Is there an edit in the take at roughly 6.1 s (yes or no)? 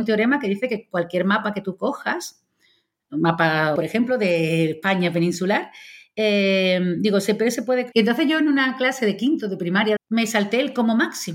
no